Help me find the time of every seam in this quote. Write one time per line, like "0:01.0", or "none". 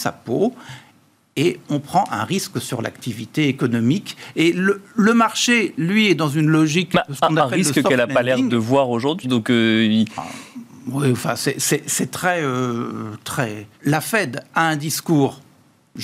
0:09.2
0:13.7

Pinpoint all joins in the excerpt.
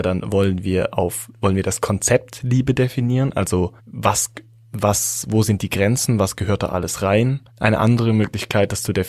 0:03.8
0:07.5

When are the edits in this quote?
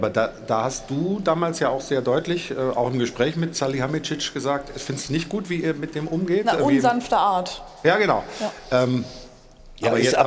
none

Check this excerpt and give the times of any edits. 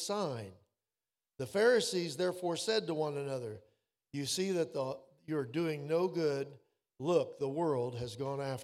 none

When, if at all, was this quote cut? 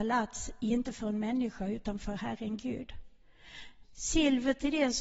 0:03.8

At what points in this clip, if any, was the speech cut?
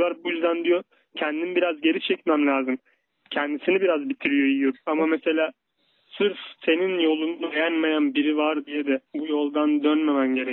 0:04.7
0:06.6
0:09.1

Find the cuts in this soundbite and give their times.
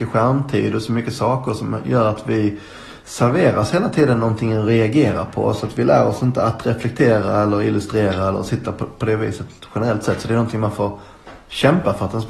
none

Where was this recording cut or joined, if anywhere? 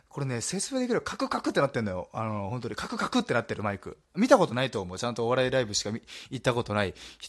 0:04.0

